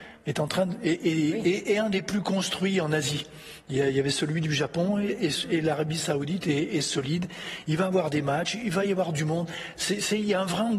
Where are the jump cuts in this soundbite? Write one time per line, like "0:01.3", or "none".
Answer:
0:09.8